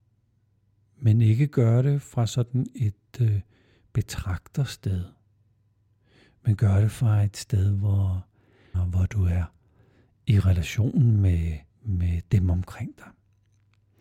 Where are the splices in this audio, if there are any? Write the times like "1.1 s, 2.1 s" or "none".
8.7 s, 11.7 s

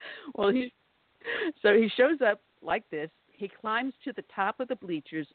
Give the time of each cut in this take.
none

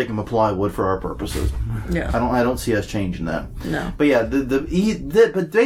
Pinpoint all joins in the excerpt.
none

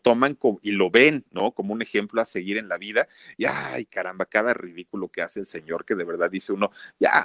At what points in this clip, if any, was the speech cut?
none

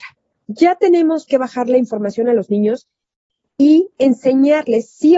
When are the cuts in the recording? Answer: 1.3 s

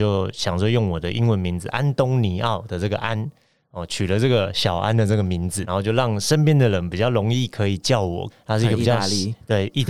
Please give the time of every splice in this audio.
5.6 s, 8.3 s

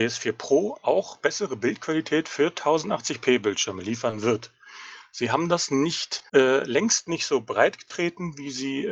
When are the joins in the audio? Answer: 6.3 s

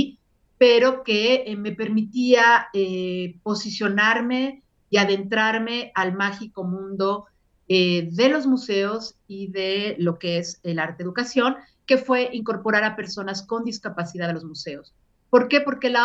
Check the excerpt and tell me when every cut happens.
none

